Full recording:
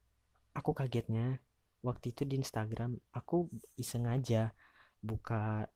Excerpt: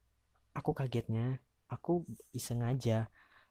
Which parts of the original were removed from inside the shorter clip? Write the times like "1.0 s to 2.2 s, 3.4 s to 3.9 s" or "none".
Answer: 1.7 s to 3.1 s